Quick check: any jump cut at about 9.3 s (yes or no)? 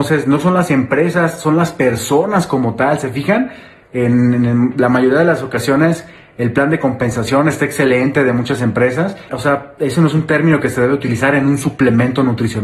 yes